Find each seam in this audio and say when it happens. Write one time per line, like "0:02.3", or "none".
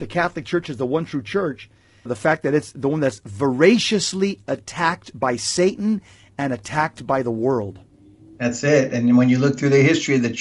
0:02.1